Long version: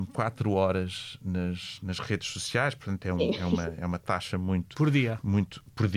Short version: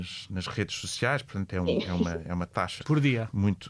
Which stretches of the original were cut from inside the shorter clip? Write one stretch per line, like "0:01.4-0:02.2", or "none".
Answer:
0:04.3-0:04.7